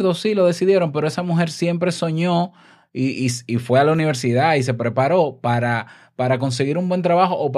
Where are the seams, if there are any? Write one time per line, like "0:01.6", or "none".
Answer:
none